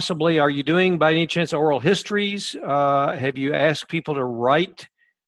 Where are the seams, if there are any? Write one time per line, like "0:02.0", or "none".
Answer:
none